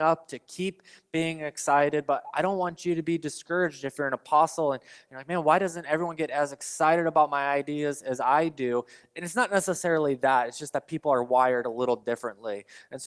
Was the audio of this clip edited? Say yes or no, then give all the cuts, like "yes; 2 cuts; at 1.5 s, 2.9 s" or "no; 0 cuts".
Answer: no; 0 cuts